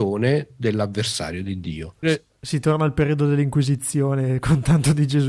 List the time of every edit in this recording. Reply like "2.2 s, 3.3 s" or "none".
2.0 s